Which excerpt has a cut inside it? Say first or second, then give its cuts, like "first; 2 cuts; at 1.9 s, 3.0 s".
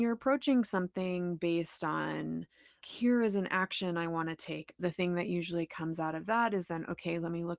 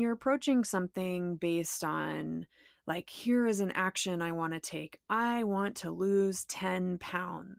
first; 2 cuts; at 2.8 s, 4.8 s